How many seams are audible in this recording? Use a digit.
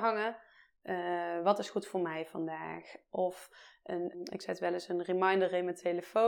1